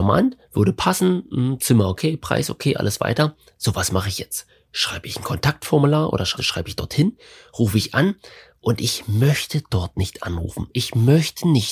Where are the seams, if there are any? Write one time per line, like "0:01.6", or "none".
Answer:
0:06.4